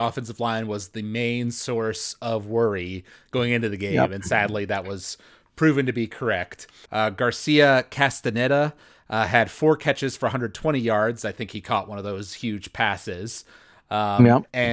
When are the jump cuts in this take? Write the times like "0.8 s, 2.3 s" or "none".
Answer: 6.9 s